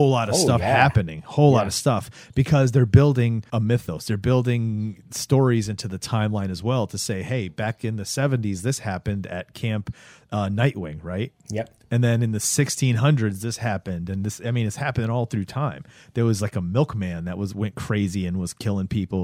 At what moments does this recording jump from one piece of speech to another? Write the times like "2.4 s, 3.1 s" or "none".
3.5 s